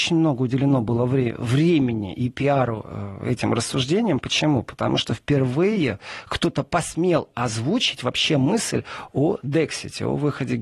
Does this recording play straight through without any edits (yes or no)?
yes